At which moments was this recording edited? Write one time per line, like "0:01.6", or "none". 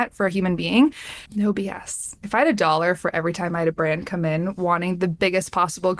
0:01.3